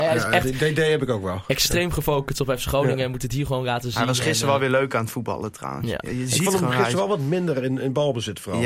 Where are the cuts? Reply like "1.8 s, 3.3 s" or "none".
none